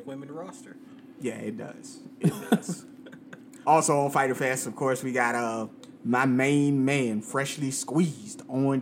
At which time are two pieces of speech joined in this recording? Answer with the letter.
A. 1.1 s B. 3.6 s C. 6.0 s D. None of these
B